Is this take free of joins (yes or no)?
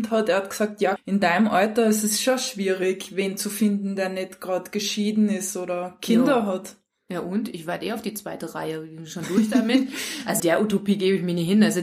no